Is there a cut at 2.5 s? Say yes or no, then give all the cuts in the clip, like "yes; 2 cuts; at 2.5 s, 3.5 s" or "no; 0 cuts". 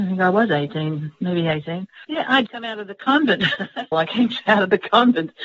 yes; 2 cuts; at 2.5 s, 3.9 s